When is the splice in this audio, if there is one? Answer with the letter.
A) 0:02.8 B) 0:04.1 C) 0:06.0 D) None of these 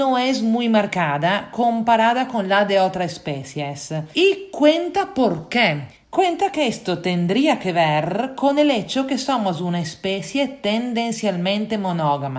D